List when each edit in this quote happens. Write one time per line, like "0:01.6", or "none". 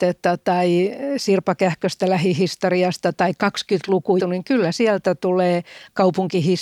0:04.2